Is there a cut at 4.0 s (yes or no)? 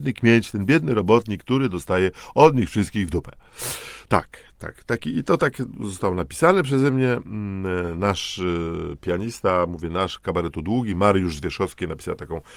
no